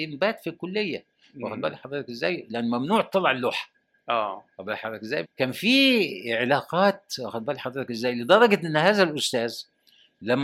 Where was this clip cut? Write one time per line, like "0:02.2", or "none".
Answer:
0:05.2